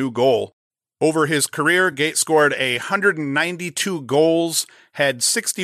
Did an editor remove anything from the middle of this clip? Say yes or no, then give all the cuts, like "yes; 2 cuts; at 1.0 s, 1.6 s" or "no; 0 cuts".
no; 0 cuts